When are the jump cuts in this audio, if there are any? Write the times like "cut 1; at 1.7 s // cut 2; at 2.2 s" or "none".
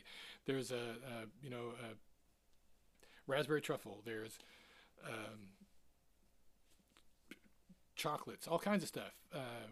none

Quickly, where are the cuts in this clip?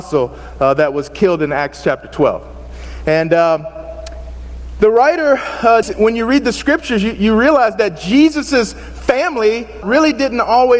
cut 1; at 5.8 s // cut 2; at 9.8 s

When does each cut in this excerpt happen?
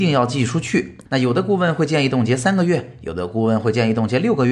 cut 1; at 1.1 s

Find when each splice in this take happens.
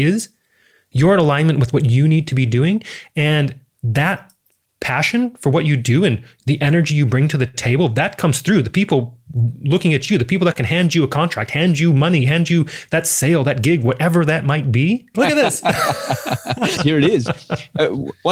cut 1; at 15.1 s // cut 2; at 16.8 s

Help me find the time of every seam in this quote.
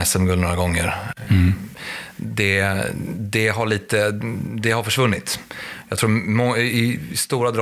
none

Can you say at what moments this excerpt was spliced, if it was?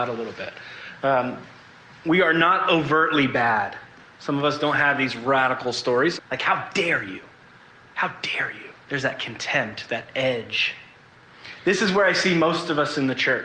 cut 1; at 6.2 s // cut 2; at 8.8 s

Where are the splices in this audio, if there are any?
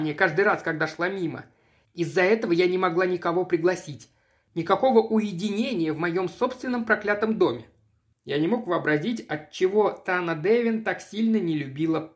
cut 1; at 8.1 s

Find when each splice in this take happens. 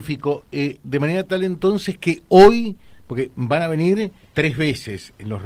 cut 1; at 4.3 s

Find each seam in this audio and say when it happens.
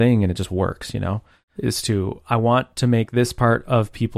cut 1; at 1.5 s

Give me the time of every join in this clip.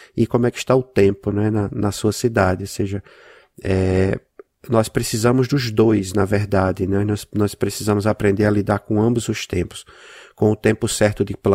none

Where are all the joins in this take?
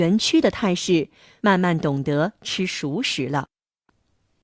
cut 1; at 1.4 s

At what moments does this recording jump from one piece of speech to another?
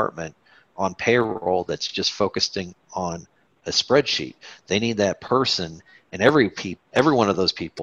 none

